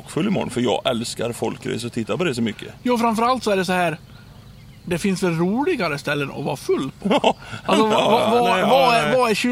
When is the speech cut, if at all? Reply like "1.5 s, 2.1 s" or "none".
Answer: none